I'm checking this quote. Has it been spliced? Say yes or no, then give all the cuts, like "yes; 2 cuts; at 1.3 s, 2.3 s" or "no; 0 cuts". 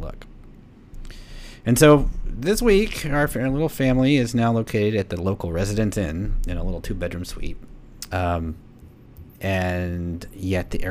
yes; 1 cut; at 8.1 s